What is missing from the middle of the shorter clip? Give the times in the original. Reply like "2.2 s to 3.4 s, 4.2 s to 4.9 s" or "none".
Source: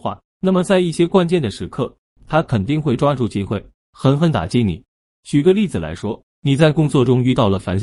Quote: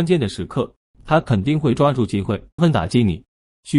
3.8 s to 4.2 s